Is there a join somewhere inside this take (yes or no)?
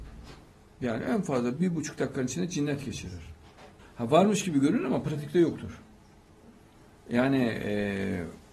yes